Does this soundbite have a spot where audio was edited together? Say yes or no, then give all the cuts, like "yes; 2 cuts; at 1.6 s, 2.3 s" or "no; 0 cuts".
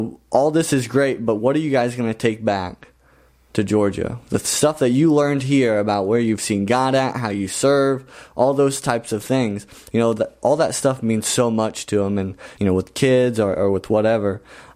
yes; 2 cuts; at 9.9 s, 12.5 s